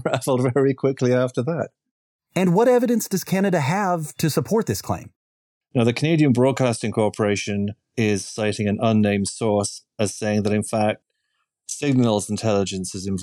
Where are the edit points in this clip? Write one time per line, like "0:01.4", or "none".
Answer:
0:05.6